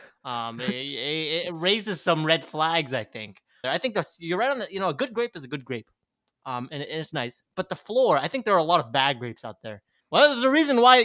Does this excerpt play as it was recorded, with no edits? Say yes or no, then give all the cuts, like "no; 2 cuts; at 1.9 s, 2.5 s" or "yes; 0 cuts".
no; 2 cuts; at 3.6 s, 10.0 s